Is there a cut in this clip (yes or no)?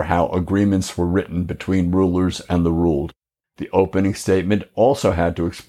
yes